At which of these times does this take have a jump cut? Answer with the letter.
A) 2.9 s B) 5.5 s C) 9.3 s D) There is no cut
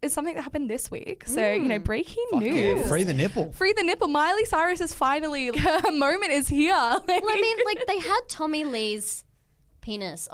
B